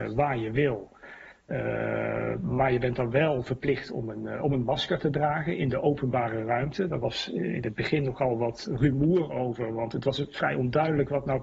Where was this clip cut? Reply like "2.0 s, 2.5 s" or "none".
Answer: none